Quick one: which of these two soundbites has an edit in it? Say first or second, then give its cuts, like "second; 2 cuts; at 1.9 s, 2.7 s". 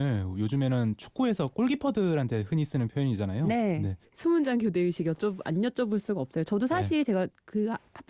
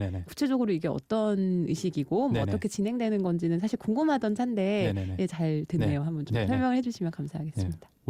first; 1 cut; at 4.0 s